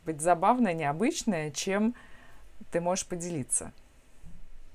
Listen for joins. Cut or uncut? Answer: uncut